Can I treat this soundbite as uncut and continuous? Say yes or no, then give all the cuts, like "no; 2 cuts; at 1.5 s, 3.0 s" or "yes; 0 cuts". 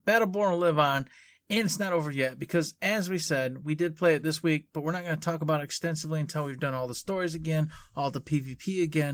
yes; 0 cuts